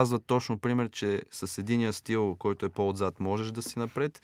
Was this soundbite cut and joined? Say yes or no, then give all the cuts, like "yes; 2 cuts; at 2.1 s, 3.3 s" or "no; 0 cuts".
no; 0 cuts